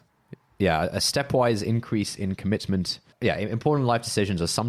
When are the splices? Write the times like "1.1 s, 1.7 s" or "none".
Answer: 3.1 s